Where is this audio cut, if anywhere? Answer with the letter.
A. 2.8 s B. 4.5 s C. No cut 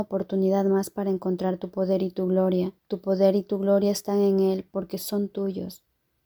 A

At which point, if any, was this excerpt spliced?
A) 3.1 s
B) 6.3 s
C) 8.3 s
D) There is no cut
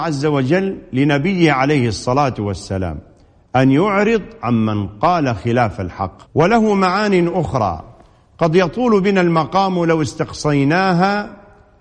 B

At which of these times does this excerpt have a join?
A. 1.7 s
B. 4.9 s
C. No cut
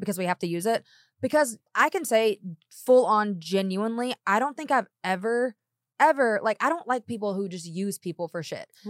A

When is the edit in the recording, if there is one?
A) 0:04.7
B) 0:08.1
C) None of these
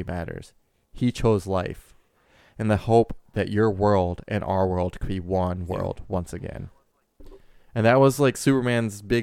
C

